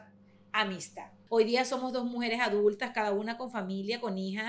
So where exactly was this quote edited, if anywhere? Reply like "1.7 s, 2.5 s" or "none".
1.3 s